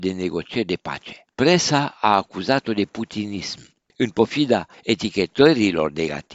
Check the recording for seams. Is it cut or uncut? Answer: cut